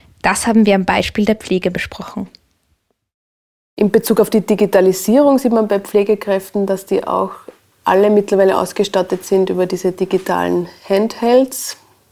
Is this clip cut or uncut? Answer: uncut